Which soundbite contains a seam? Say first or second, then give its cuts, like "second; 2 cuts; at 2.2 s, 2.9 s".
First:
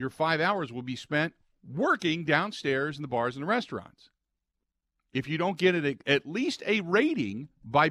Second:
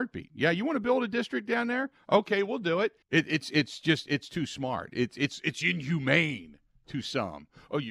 second; 1 cut; at 3.0 s